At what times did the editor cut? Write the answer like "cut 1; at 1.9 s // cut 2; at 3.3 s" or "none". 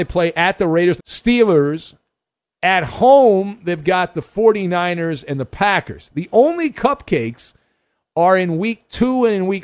cut 1; at 1.0 s